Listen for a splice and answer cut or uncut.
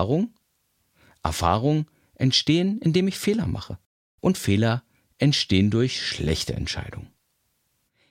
uncut